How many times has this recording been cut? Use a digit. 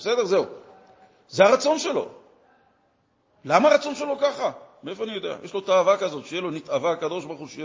0